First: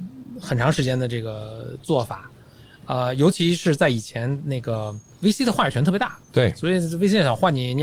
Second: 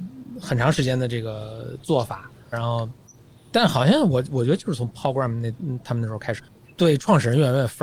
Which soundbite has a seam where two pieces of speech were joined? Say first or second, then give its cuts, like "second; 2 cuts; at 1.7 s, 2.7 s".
second; 2 cuts; at 2.5 s, 6.4 s